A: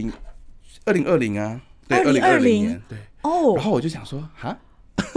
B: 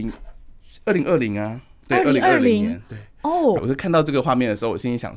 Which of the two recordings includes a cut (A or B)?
B